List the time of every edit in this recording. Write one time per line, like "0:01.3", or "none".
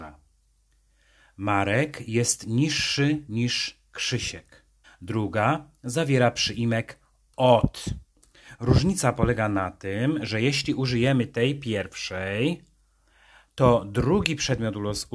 0:04.8